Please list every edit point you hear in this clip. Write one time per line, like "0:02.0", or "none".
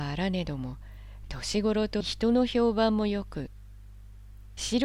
0:02.0